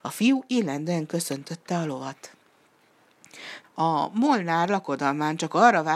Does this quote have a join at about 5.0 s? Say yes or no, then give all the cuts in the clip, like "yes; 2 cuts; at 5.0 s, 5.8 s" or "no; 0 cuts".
no; 1 cut; at 3.6 s